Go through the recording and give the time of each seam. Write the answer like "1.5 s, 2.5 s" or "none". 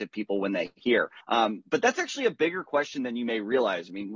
1.2 s